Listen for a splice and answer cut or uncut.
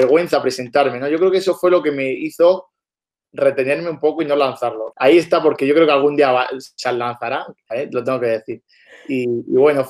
cut